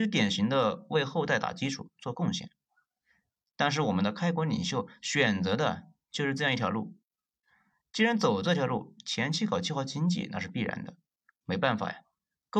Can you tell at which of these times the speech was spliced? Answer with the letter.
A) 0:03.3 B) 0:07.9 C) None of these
C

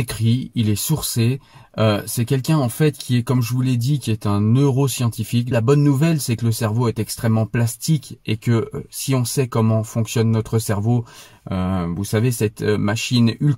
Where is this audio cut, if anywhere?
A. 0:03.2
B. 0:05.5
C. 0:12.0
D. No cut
B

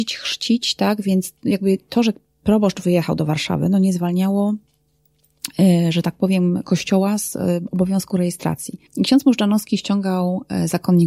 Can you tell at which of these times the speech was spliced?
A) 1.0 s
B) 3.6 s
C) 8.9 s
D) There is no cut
C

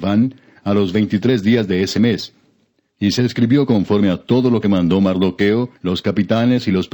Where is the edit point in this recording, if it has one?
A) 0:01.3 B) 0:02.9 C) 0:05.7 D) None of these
C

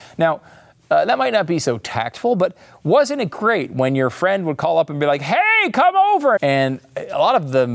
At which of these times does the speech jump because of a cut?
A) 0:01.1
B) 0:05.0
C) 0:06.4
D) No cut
C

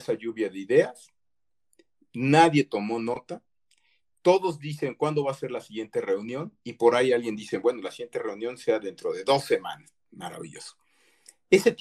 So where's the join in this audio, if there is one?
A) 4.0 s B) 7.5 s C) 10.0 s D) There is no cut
D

